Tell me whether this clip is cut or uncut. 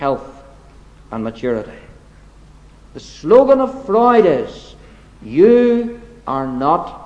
uncut